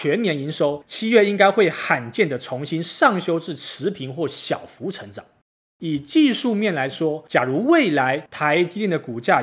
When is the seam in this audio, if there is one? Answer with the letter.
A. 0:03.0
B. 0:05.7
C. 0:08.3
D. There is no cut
D